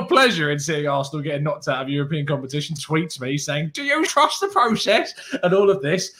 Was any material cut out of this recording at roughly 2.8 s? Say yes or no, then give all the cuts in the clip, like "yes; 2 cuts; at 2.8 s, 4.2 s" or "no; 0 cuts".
yes; 2 cuts; at 2.8 s, 4.1 s